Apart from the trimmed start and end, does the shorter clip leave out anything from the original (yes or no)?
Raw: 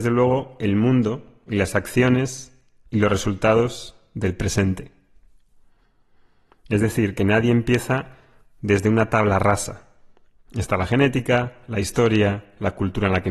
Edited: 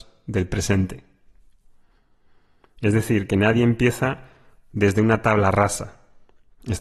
no